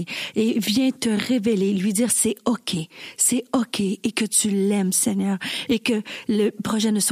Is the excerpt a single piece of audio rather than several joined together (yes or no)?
yes